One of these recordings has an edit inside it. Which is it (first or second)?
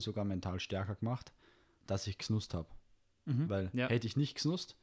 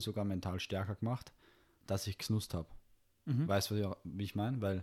first